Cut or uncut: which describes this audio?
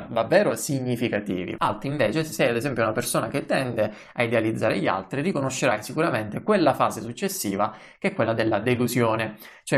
cut